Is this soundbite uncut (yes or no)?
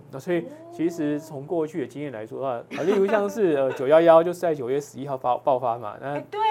no